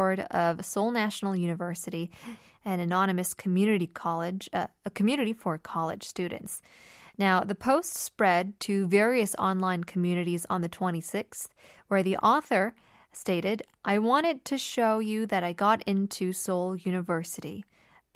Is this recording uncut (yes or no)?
yes